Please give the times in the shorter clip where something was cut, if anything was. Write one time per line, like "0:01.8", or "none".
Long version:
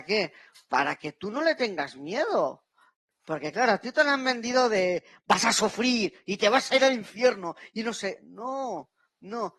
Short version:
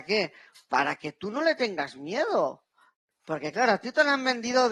none